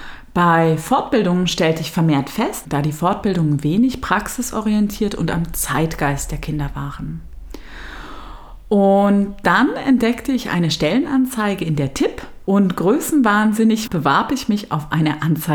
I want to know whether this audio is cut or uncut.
cut